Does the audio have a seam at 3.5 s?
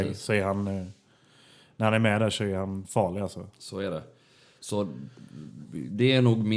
no; 0 cuts

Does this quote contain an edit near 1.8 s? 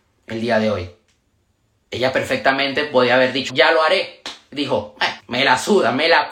no; 2 cuts; at 3.5 s, 5.2 s

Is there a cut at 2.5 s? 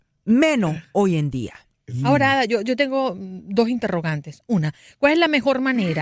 no; 0 cuts

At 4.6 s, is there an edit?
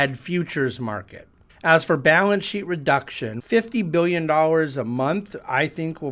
no; 2 cuts; at 1.5 s, 3.4 s

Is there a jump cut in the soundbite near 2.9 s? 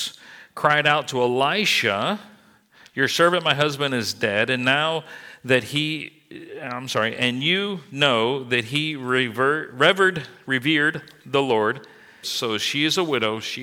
no; 1 cut; at 12.2 s

